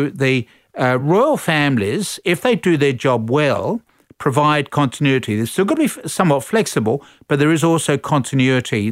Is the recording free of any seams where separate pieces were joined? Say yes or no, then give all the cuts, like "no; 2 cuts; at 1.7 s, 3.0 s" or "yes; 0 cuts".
yes; 0 cuts